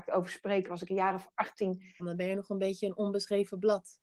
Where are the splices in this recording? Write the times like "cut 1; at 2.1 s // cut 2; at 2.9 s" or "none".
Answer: cut 1; at 2.0 s